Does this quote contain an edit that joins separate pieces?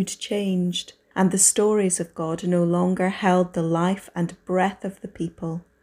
yes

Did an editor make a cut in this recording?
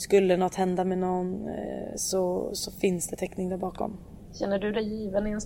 no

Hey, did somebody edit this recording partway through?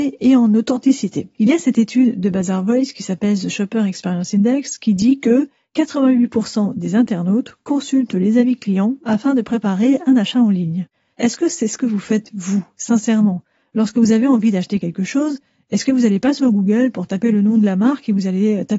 yes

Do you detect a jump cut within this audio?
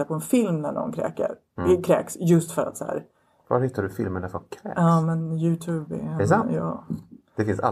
no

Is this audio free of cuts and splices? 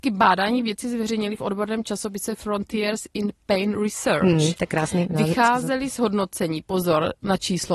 yes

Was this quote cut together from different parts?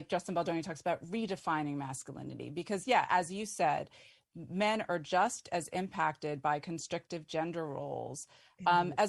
no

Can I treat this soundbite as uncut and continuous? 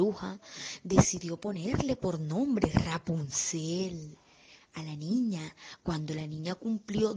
yes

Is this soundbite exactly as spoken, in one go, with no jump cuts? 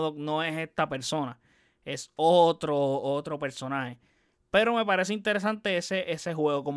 yes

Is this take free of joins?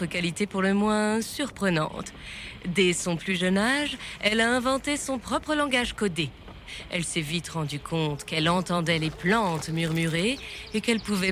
yes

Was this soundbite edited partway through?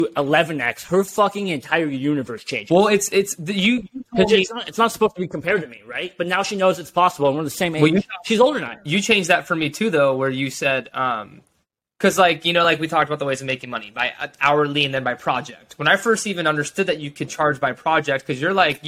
no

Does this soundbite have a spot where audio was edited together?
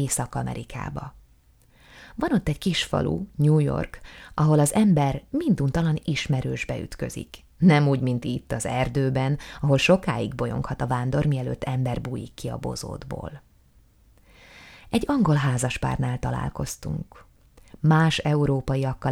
no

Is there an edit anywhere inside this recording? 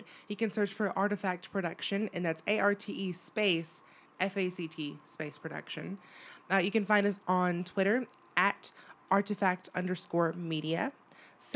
no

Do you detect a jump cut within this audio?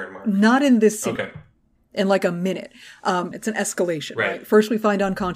yes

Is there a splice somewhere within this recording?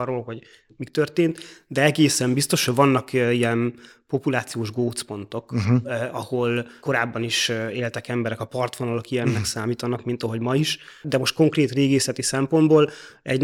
no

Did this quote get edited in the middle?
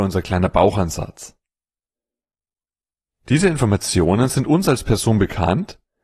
no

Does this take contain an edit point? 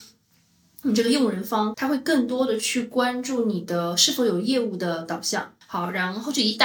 yes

